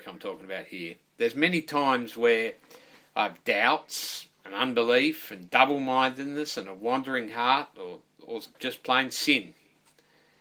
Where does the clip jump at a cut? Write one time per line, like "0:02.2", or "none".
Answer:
none